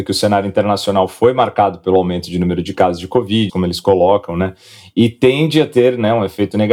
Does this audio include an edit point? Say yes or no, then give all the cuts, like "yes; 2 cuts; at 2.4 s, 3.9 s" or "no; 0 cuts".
yes; 1 cut; at 3.5 s